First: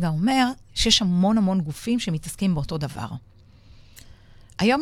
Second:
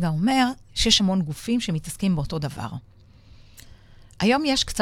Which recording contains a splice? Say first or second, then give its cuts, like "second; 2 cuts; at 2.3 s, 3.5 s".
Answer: second; 1 cut; at 1.0 s